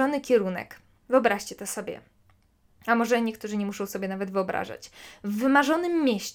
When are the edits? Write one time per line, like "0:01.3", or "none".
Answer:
none